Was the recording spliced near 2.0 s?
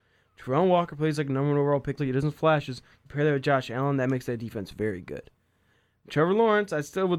yes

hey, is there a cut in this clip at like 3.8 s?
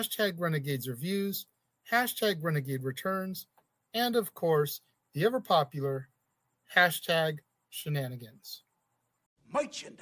no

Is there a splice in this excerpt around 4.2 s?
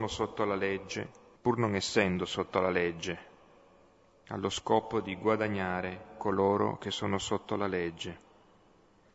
no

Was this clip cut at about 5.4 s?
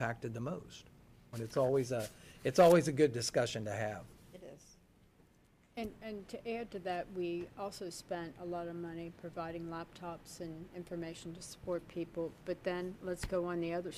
no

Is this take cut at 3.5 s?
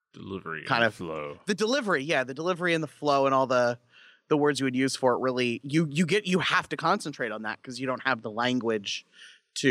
no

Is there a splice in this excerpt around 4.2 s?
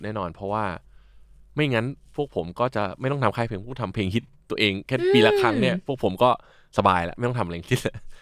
no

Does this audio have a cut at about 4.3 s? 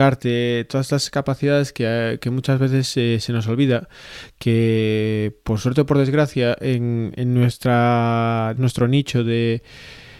no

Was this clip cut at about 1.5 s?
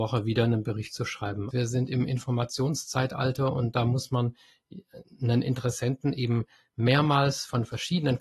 yes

